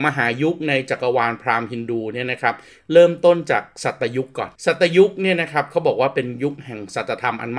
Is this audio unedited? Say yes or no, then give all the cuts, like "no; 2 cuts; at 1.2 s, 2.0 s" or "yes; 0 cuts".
no; 1 cut; at 4.6 s